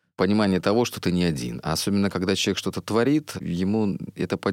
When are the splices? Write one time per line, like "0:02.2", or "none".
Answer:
none